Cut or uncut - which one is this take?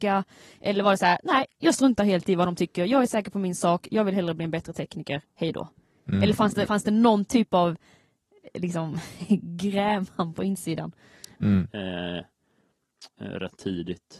cut